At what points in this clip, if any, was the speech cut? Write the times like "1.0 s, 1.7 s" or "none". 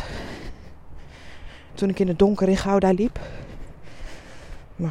1.7 s